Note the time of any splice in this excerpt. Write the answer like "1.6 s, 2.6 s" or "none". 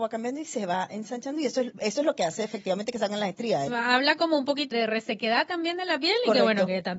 3.7 s, 4.7 s